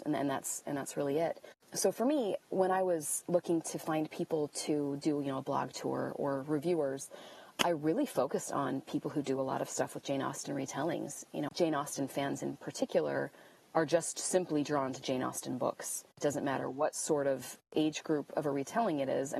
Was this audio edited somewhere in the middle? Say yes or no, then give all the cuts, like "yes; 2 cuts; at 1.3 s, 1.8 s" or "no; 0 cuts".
yes; 1 cut; at 11.5 s